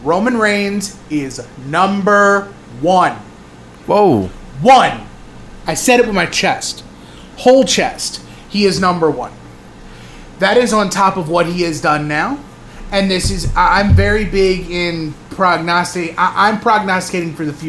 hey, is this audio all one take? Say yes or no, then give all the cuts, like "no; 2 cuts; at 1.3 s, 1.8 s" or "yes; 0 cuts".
yes; 0 cuts